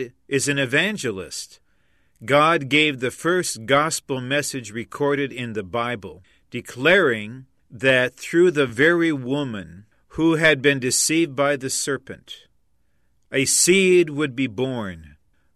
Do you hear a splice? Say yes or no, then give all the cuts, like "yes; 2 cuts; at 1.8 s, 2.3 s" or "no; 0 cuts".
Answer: no; 0 cuts